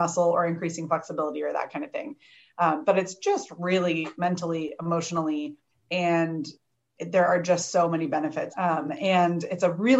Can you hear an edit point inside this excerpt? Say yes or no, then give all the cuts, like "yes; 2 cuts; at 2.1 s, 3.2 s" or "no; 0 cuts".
yes; 3 cuts; at 4.2 s, 5.7 s, 8.5 s